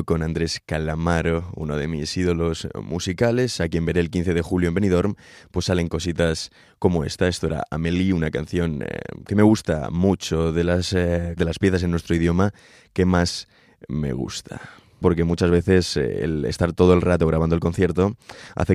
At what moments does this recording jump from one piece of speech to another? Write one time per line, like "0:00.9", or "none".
0:11.4
0:15.0

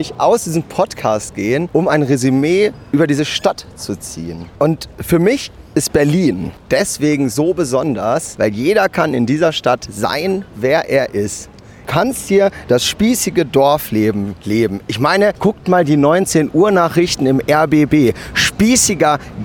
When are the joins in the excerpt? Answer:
none

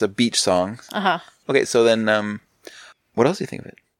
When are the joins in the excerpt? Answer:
0:01.4

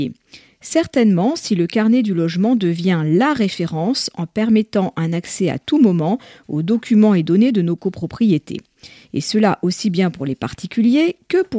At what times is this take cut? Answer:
none

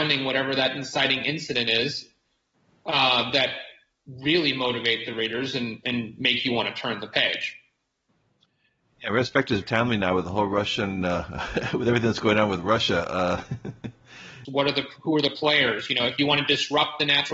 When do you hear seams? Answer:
0:09.6
0:14.5

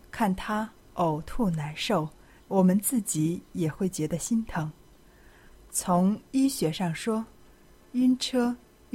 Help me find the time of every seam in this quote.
0:02.4

